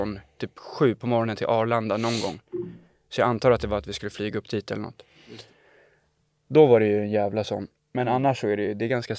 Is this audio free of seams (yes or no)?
yes